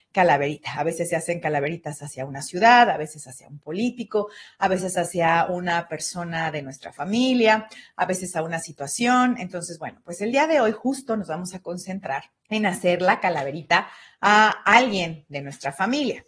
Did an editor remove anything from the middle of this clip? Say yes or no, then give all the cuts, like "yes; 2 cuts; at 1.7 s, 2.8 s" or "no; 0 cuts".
yes; 1 cut; at 12.4 s